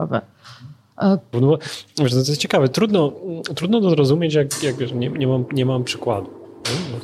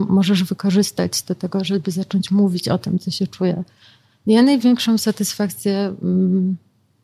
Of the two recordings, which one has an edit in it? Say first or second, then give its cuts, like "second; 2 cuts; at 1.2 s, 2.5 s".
first; 1 cut; at 1.3 s